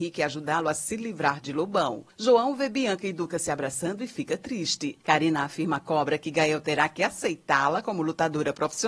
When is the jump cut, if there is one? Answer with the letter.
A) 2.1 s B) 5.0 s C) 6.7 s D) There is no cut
B